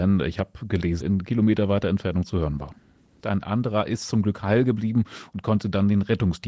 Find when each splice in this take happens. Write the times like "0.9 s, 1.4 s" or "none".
1.0 s, 3.2 s

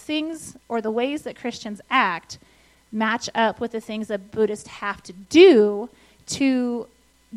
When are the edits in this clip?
none

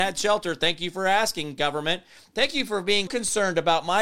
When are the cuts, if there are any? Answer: 3.1 s

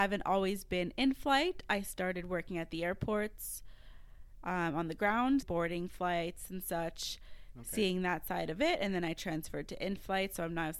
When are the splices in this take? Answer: 5.4 s

